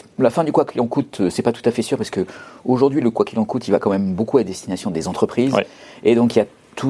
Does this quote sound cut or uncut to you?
uncut